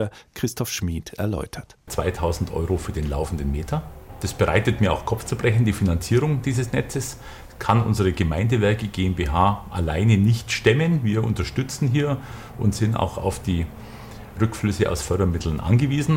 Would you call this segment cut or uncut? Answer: cut